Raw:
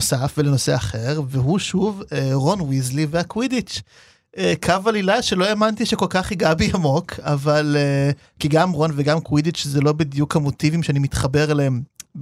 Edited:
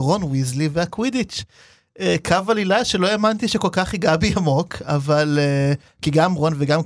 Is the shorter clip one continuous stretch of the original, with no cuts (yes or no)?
yes